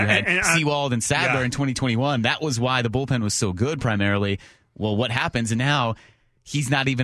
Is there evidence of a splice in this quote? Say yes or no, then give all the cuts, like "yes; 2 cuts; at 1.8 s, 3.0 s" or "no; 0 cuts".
no; 0 cuts